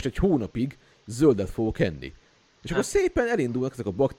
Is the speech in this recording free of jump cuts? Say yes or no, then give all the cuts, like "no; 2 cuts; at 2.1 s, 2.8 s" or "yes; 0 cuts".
yes; 0 cuts